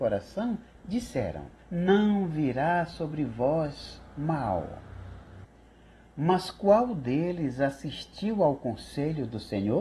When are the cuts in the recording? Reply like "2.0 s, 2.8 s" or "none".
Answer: 1.6 s